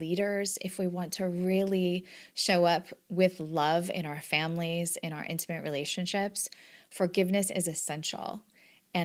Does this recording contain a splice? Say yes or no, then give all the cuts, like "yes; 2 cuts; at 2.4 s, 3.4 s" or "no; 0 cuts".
no; 0 cuts